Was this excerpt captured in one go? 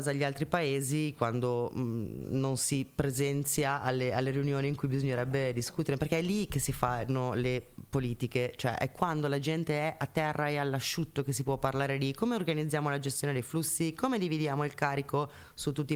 yes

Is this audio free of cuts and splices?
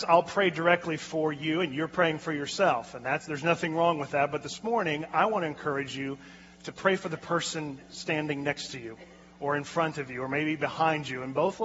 yes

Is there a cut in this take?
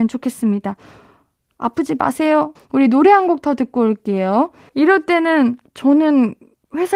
yes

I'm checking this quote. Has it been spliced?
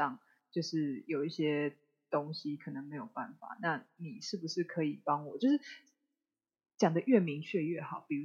no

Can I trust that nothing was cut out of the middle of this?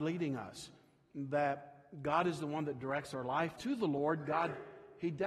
no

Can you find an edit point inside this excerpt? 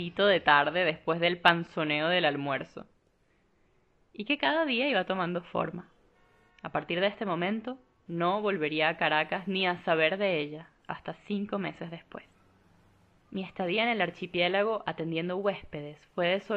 yes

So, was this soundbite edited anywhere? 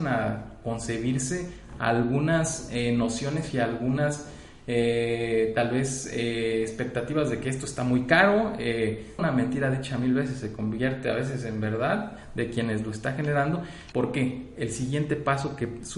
yes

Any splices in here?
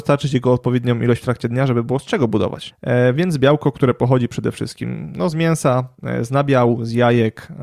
yes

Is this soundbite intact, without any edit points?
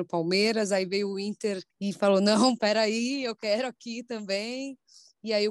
no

